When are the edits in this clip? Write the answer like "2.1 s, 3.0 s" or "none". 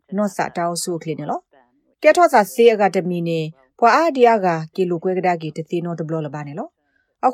none